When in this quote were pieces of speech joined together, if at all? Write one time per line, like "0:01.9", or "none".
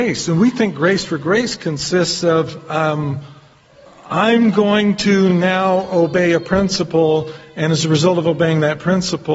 none